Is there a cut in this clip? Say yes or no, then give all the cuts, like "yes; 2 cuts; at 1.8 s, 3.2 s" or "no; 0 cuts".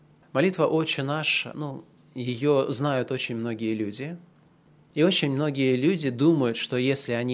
no; 0 cuts